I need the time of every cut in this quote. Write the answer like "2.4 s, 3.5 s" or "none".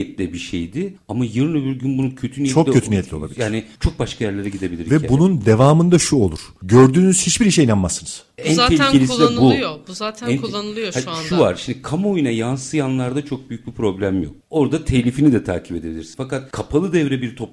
none